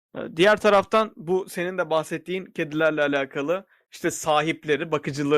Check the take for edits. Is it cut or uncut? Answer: uncut